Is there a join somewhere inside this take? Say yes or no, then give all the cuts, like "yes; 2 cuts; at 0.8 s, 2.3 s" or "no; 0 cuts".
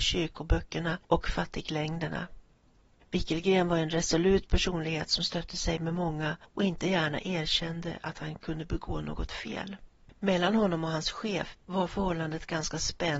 yes; 1 cut; at 11.6 s